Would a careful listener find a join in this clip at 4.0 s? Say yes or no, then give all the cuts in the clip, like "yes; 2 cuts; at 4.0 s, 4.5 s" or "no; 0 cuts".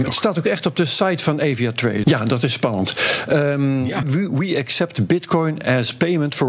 yes; 2 cuts; at 2.0 s, 4.0 s